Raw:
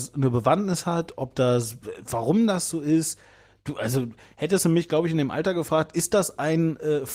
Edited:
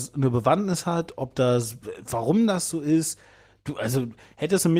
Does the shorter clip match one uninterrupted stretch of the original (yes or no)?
yes